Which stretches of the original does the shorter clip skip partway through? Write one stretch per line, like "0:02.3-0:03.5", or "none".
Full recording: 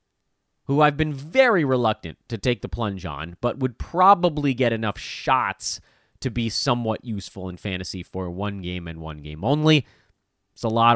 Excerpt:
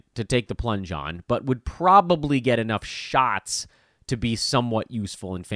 none